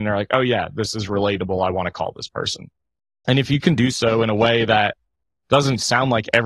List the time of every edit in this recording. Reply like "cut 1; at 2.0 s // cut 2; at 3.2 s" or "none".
none